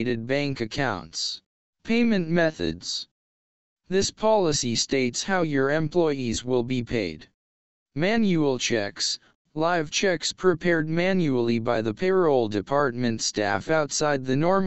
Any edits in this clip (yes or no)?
yes